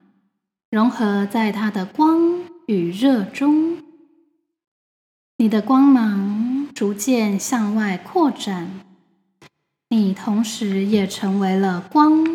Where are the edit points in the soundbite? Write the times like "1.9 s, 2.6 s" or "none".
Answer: none